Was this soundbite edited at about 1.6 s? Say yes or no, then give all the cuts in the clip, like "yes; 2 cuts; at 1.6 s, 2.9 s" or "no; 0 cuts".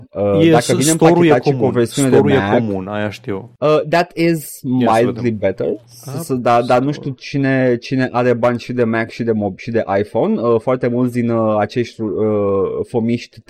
no; 0 cuts